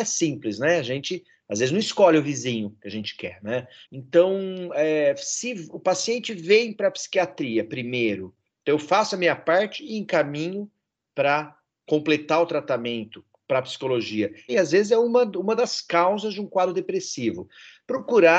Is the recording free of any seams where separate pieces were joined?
no; 2 cuts; at 3.8 s, 14.5 s

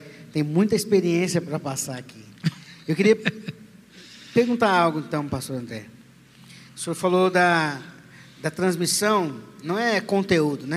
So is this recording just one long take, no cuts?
yes; 0 cuts

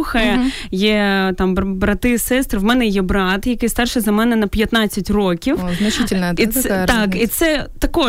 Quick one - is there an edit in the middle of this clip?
no; 0 cuts

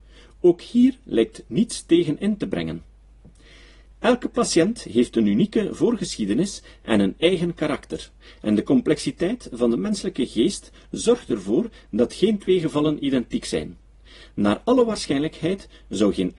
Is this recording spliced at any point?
no; 0 cuts

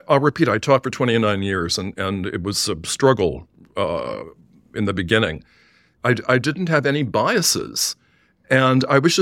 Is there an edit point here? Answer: yes; 1 cut; at 6.0 s

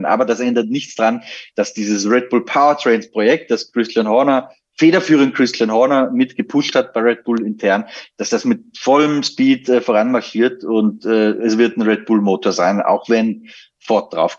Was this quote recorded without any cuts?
yes; 0 cuts

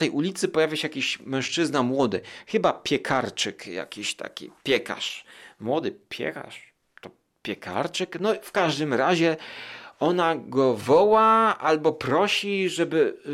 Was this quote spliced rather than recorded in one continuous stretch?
no; 0 cuts

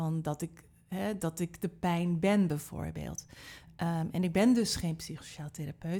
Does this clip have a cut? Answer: yes; 1 cut; at 1.2 s

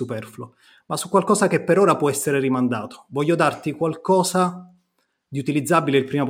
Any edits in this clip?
no; 0 cuts

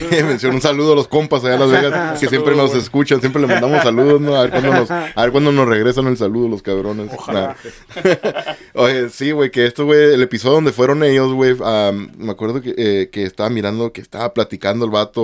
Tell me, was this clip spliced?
no; 0 cuts

